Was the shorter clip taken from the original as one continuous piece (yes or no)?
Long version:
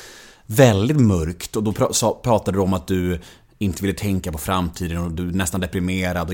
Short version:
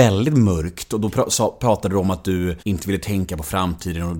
no